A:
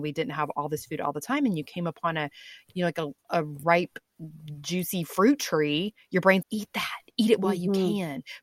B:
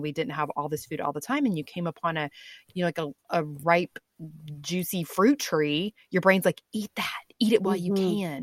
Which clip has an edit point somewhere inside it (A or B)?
A